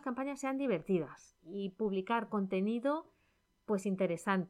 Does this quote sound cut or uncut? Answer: cut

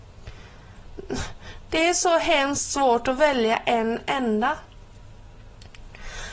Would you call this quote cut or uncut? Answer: cut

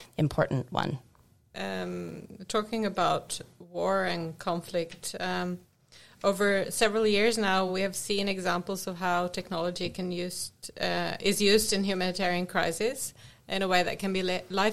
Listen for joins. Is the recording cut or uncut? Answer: uncut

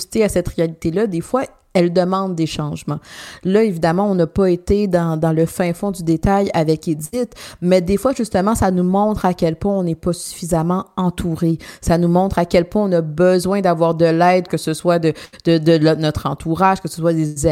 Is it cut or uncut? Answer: cut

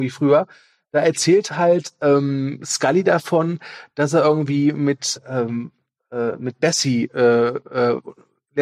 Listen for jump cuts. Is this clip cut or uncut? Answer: cut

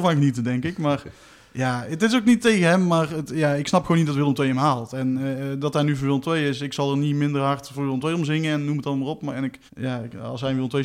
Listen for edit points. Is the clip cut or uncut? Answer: cut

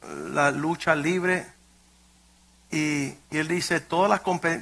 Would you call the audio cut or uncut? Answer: uncut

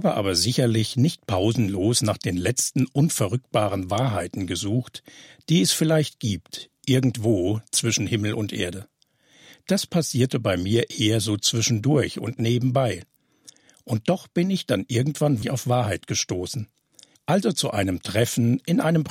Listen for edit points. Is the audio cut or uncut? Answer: cut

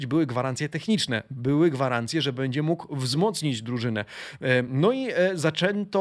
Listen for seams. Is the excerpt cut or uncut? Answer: uncut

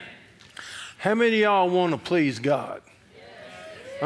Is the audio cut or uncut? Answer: uncut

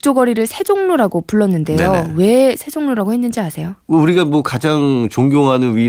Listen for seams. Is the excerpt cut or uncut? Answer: cut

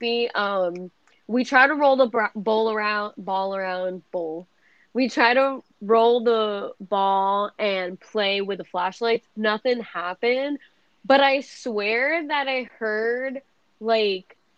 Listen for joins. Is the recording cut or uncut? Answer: uncut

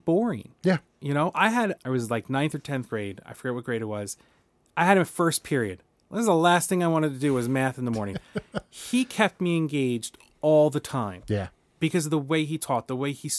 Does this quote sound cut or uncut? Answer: cut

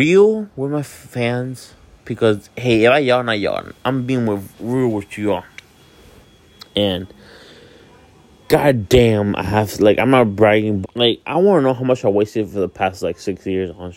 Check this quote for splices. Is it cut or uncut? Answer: cut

